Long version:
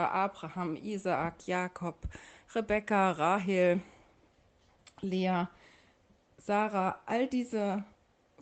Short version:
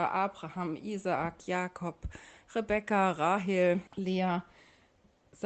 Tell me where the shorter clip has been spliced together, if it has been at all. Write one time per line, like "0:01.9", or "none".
0:03.9